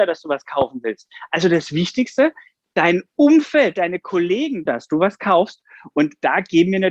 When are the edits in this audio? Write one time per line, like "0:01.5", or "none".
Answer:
0:04.7